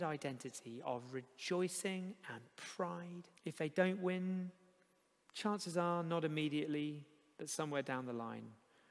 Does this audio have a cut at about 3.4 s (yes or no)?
yes